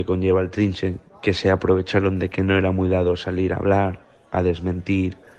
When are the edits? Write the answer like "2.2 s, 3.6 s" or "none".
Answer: none